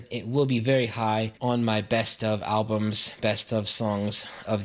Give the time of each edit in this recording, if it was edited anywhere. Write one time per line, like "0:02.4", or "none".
none